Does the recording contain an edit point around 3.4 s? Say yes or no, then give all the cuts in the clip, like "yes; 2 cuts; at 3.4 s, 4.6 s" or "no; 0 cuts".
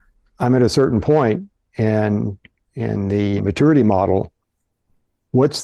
yes; 1 cut; at 3.4 s